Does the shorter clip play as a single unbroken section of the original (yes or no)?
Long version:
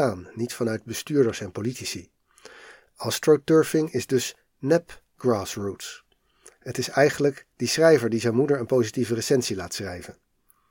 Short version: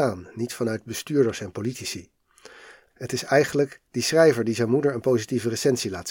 no